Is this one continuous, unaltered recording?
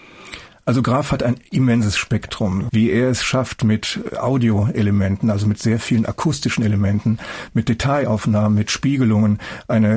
no; 1 cut; at 2.7 s

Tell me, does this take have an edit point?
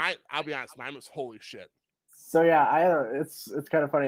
yes; 1 cut; at 1.9 s

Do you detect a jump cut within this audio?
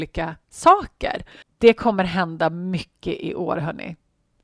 yes; 1 cut; at 1.4 s

